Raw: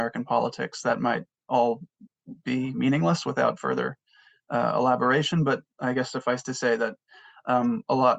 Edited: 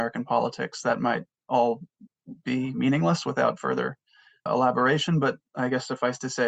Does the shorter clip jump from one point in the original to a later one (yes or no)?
yes